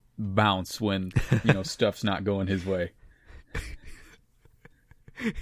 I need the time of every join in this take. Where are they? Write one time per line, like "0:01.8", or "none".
none